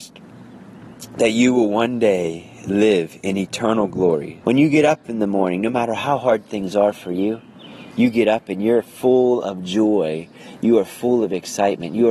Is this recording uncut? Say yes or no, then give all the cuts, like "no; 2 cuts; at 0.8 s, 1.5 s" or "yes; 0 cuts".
no; 1 cut; at 4.4 s